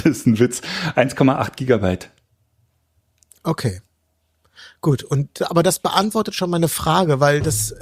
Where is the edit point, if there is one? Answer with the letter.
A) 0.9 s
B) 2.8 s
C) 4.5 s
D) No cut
D